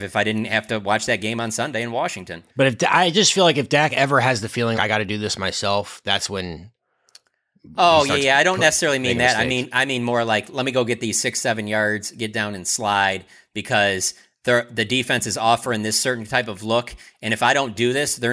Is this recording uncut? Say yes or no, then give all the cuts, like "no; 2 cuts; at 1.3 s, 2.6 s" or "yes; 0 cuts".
no; 1 cut; at 4.7 s